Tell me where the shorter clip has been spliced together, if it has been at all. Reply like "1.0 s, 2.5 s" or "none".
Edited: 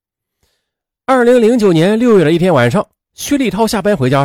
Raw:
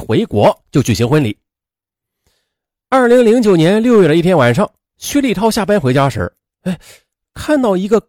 none